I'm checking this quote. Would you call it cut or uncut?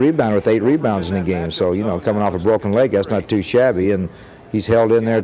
uncut